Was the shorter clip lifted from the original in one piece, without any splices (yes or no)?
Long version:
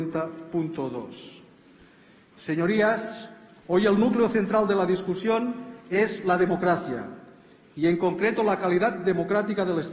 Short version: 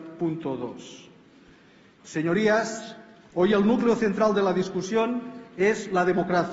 yes